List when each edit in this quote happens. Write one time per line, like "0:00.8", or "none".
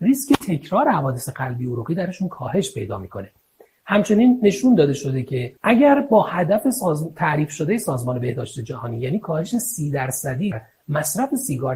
0:05.6
0:10.5